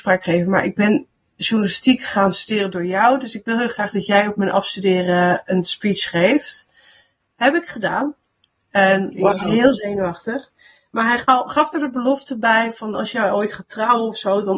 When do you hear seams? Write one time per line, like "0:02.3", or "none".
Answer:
none